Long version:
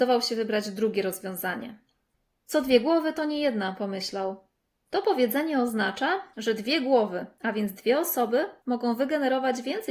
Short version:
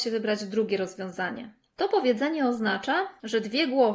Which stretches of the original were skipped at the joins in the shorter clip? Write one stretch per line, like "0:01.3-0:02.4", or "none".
0:01.9-0:04.8